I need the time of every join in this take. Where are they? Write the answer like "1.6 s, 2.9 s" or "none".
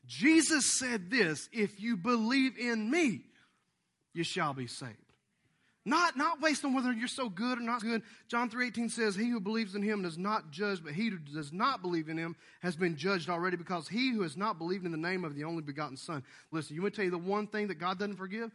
7.8 s, 16.5 s